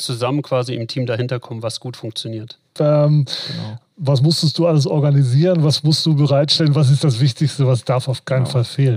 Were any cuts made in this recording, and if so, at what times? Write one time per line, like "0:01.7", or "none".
0:02.8